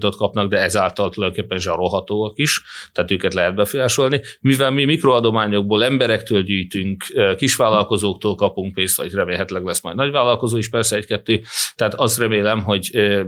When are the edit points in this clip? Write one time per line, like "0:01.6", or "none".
none